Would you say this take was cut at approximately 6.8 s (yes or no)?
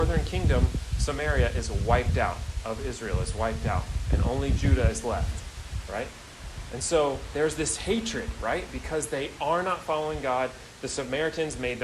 no